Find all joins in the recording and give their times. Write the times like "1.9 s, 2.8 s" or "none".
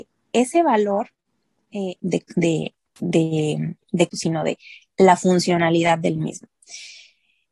2.0 s, 4.1 s